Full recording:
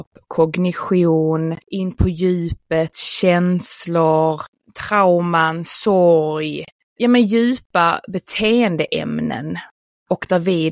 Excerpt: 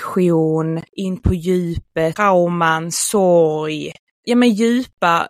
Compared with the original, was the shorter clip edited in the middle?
yes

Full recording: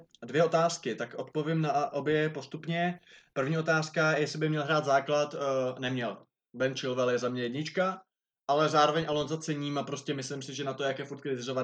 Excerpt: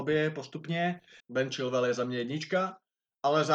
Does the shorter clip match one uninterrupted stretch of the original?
no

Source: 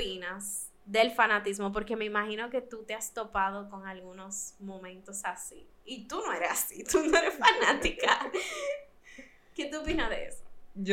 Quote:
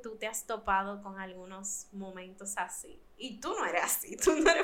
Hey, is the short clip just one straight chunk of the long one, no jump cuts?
yes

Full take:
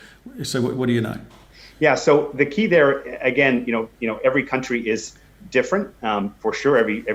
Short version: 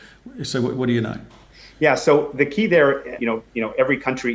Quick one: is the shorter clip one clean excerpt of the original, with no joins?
no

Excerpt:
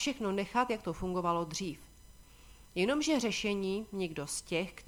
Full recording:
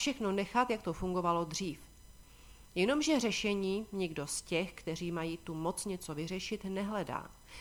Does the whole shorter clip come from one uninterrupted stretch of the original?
yes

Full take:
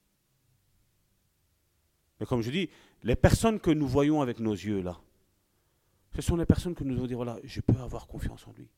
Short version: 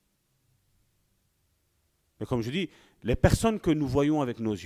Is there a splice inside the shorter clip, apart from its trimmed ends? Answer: no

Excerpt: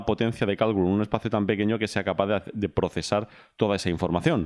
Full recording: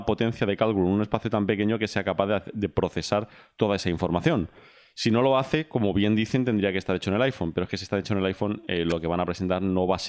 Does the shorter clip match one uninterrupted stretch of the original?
yes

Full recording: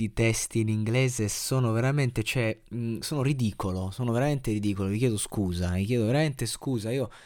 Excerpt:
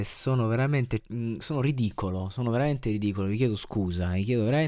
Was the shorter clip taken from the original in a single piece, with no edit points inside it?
no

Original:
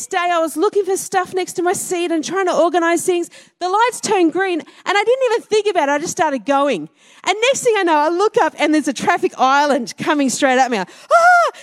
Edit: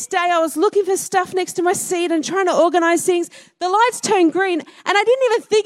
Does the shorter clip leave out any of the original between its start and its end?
no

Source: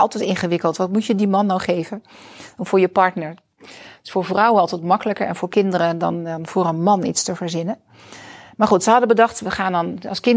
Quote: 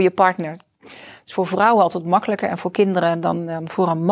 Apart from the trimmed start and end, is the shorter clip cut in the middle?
no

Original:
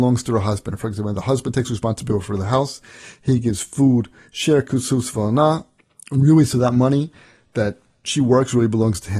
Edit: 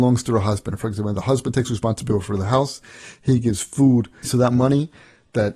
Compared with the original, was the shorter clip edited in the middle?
yes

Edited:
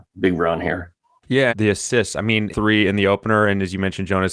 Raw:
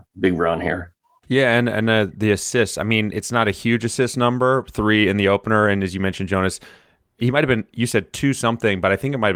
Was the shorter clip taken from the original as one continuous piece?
no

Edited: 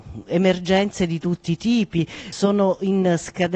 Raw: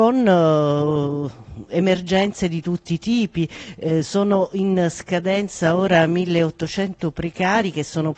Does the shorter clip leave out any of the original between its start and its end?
yes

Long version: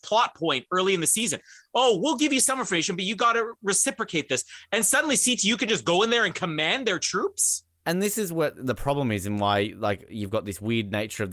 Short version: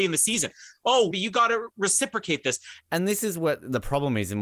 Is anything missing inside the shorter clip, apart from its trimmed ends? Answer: yes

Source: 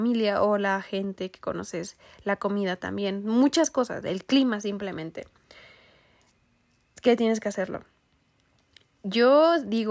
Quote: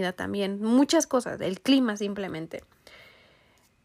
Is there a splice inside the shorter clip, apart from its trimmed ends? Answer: no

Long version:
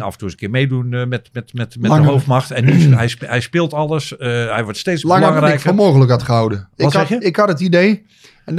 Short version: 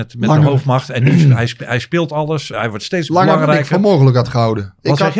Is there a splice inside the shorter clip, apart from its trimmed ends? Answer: yes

